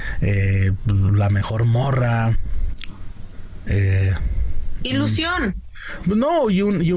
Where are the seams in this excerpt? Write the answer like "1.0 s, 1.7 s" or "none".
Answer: 3.7 s

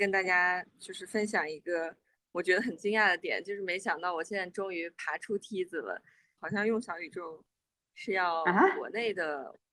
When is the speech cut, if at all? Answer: 6.4 s

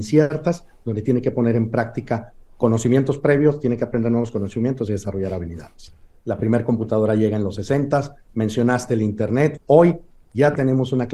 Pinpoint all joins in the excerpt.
6.1 s, 8.3 s, 9.6 s

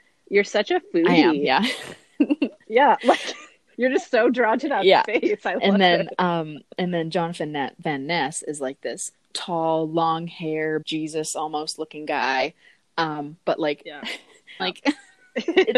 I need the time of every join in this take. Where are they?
10.8 s, 14.6 s

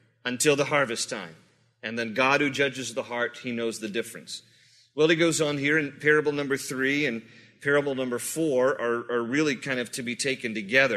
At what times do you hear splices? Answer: none

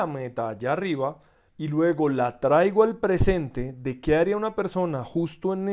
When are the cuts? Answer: 1.5 s

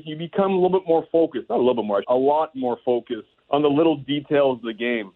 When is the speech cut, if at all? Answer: 2.0 s, 3.4 s

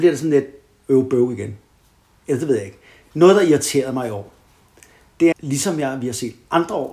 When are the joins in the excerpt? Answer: 5.3 s

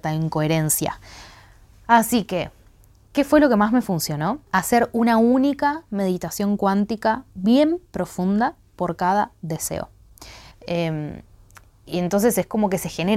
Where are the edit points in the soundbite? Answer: 4.5 s, 10.5 s

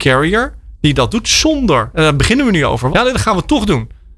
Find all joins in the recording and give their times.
2.9 s

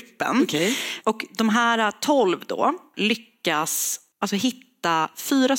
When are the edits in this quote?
1.0 s

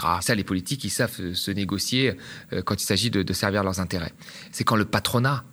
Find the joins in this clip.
4.5 s

